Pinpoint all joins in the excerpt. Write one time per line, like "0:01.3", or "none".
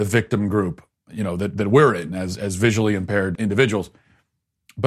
0:03.4